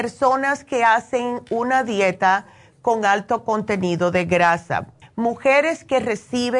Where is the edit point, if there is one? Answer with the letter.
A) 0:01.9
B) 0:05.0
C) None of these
B